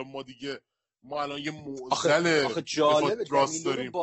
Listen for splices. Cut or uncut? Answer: uncut